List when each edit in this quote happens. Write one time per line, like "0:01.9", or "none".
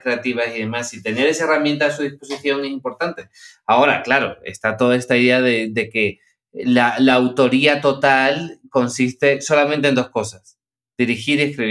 none